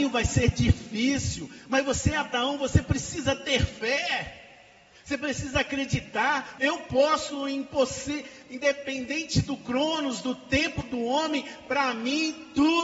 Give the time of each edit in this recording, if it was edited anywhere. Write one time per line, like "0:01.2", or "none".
0:06.6